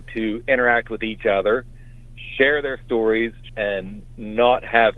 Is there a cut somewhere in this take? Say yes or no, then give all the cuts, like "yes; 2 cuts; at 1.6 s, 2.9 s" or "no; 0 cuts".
yes; 1 cut; at 3.5 s